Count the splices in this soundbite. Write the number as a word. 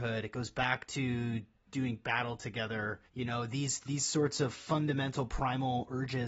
one